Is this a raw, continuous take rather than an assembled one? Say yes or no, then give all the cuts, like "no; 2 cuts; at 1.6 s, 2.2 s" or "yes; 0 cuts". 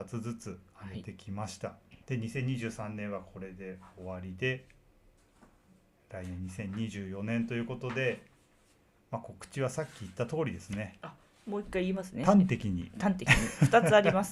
no; 1 cut; at 2.0 s